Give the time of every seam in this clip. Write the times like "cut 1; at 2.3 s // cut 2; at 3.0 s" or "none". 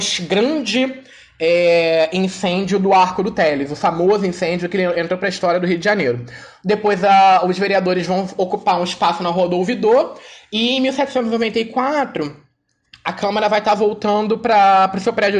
none